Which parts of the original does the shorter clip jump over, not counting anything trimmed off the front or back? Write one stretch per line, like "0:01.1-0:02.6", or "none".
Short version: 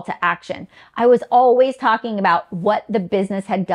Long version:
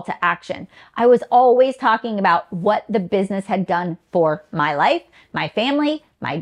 none